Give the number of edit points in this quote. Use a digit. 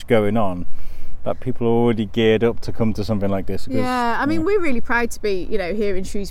0